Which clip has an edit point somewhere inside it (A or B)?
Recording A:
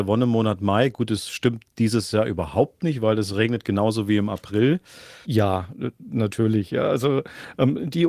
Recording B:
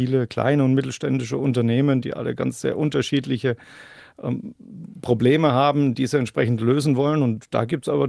A